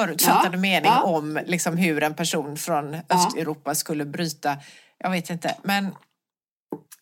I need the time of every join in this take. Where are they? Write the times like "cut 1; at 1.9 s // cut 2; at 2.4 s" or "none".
none